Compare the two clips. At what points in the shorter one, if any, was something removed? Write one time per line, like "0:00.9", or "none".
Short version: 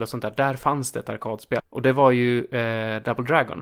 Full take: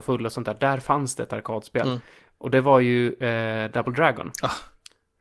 0:01.6